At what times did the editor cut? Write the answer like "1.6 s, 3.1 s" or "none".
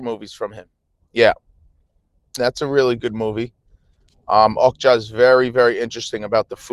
2.4 s